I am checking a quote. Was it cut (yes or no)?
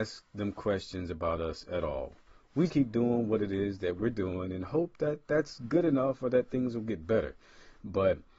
yes